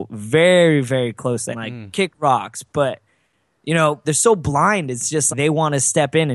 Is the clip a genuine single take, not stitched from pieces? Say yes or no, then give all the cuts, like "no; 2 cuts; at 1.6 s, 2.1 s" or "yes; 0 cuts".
no; 3 cuts; at 1.5 s, 4.0 s, 5.3 s